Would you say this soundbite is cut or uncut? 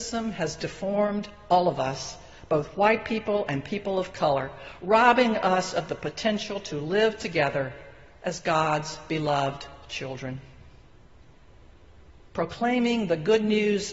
uncut